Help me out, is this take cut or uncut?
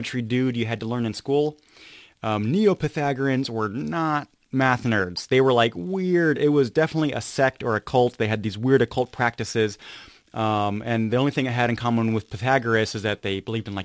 uncut